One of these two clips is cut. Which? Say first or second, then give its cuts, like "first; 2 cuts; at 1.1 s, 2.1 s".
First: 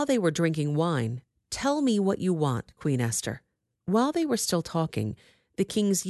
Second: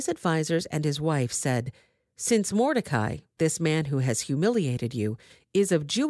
first; 2 cuts; at 1.3 s, 3.7 s